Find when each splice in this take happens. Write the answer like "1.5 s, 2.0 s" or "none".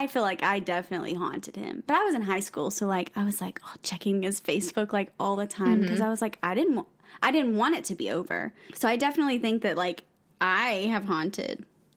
none